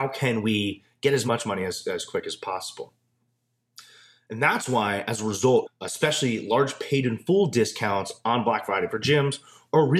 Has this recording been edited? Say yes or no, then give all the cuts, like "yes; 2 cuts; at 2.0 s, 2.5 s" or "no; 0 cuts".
yes; 1 cut; at 5.7 s